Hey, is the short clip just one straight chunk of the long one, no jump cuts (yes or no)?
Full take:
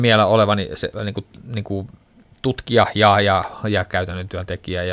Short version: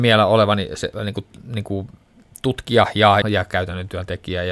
no